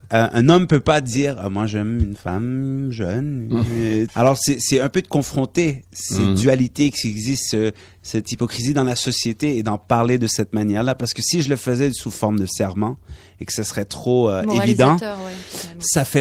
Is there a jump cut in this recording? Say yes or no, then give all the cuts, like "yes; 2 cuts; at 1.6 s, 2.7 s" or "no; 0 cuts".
yes; 1 cut; at 4.1 s